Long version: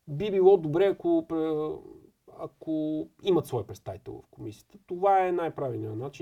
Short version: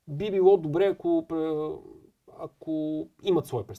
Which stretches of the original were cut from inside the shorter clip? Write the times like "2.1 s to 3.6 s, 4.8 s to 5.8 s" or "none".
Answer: none